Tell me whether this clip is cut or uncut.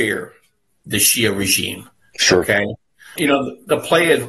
cut